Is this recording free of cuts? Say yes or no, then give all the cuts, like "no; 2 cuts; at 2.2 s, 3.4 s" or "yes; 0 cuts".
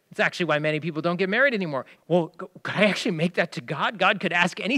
no; 1 cut; at 2.0 s